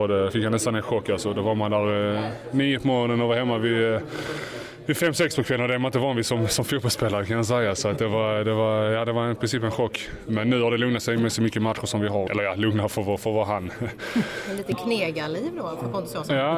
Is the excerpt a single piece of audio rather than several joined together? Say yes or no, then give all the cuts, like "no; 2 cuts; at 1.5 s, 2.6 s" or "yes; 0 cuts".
no; 1 cut; at 12.3 s